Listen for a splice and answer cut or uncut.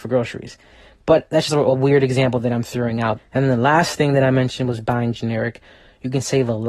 cut